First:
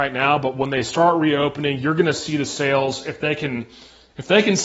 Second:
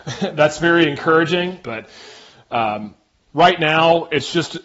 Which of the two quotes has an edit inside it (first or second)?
second